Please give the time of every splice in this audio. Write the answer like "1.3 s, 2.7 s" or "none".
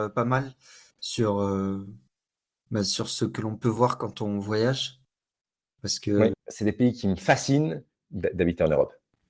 6.3 s, 8.0 s